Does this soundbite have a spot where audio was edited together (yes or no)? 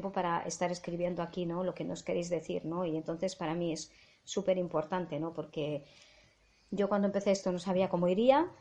no